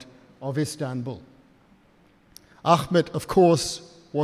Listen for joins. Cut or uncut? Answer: uncut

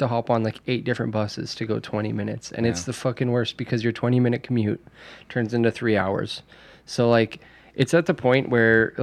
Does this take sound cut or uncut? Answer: uncut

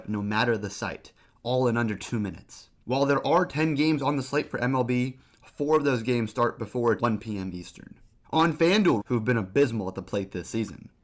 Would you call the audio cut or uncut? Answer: cut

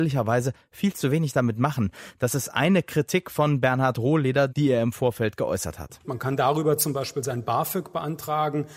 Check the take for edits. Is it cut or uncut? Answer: cut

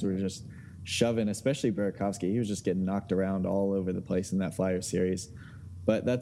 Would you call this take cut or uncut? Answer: uncut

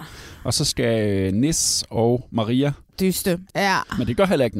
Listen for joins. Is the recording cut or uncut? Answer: cut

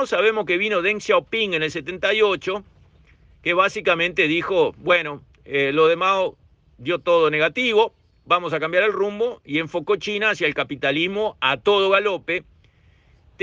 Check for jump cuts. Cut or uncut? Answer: uncut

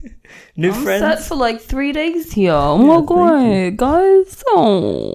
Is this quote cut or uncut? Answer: uncut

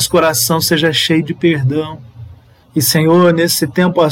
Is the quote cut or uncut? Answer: cut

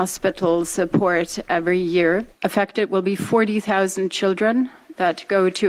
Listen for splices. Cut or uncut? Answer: cut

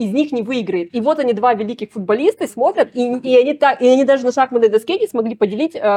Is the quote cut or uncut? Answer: cut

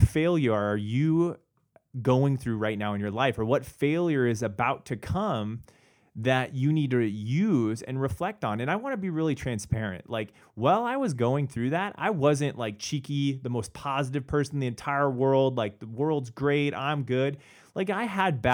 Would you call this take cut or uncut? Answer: uncut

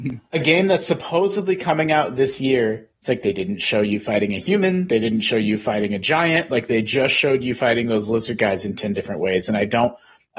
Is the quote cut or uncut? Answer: uncut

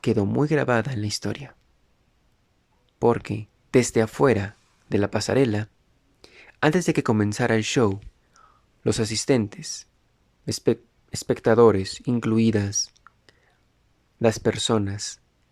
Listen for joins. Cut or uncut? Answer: uncut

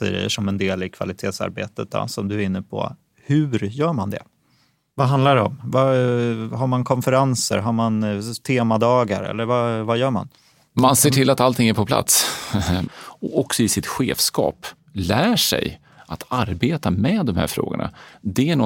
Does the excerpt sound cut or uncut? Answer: cut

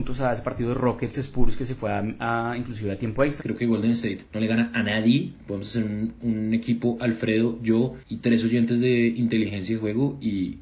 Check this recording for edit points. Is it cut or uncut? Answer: cut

